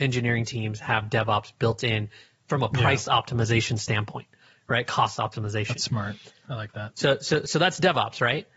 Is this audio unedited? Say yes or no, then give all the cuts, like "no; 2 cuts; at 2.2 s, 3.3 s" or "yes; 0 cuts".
yes; 0 cuts